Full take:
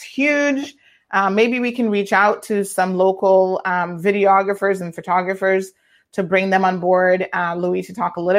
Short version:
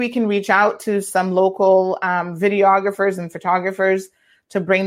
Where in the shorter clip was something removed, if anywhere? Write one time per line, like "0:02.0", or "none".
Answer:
none